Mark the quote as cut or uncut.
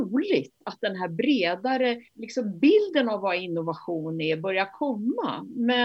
cut